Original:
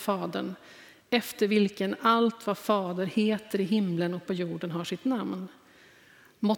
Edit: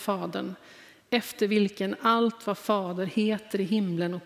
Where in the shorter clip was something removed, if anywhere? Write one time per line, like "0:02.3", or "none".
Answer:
none